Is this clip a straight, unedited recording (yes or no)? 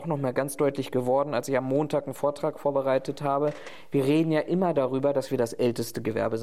yes